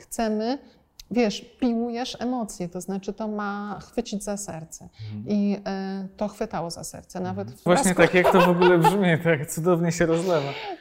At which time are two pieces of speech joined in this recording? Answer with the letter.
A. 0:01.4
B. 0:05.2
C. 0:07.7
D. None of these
C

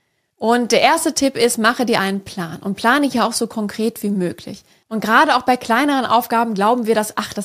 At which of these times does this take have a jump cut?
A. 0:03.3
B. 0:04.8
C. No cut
B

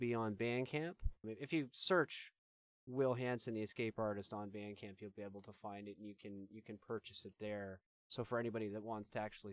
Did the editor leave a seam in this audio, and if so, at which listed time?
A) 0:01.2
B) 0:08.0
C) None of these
A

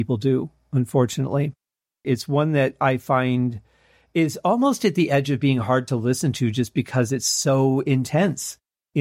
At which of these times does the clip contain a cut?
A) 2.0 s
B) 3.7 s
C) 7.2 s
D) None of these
A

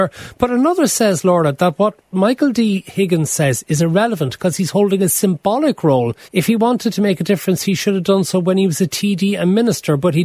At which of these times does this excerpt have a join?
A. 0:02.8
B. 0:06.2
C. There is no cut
B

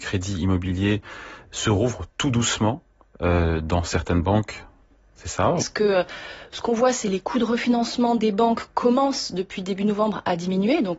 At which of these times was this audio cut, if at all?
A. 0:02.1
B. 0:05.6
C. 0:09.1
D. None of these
B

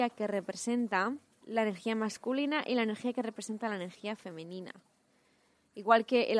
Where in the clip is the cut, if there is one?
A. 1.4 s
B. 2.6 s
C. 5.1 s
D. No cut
A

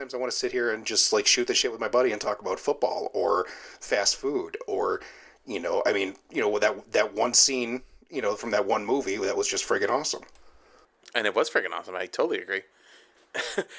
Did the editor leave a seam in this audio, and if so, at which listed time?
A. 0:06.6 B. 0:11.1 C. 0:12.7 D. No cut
D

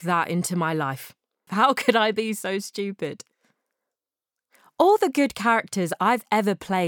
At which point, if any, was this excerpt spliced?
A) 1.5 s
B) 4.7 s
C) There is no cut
A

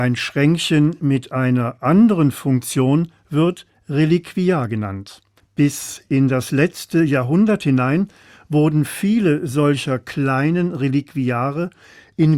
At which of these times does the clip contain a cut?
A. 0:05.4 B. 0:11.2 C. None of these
A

